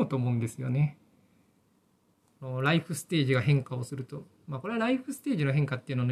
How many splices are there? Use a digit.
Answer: 0